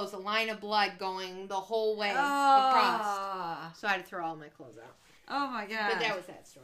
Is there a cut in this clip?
no; 0 cuts

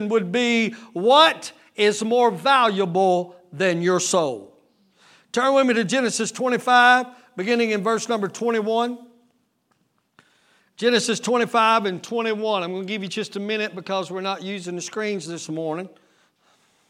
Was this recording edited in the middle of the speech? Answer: no; 0 cuts

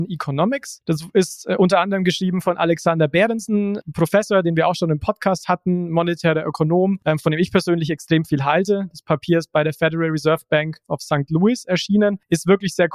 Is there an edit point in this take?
no; 0 cuts

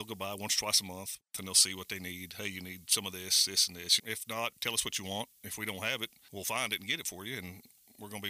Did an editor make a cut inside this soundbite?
yes; 1 cut; at 4.0 s

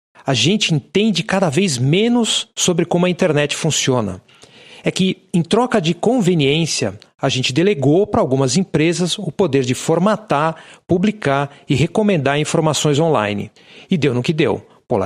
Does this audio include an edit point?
no; 0 cuts

